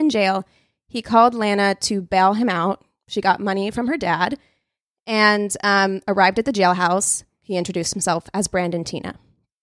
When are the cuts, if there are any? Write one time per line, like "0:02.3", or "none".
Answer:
0:07.4